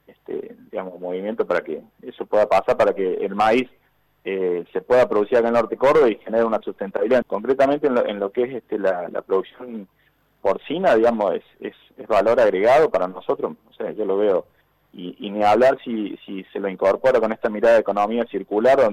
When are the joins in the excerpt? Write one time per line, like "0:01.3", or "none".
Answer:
0:07.2

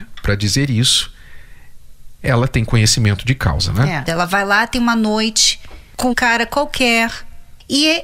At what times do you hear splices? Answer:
0:04.1
0:06.1

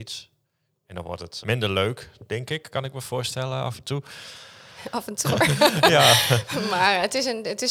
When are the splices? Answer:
0:01.4
0:05.2

